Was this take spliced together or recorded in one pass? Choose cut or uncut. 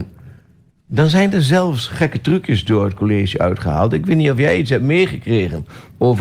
uncut